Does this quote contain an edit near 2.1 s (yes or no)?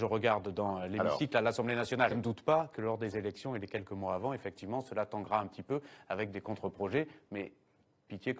yes